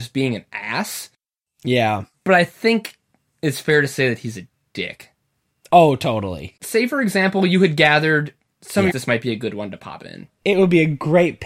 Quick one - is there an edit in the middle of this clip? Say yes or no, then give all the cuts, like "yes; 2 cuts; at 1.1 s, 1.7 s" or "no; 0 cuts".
yes; 2 cuts; at 6.6 s, 8.9 s